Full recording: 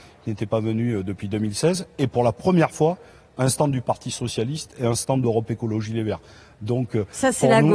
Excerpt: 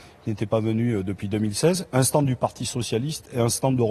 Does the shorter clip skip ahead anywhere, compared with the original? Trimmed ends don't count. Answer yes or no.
yes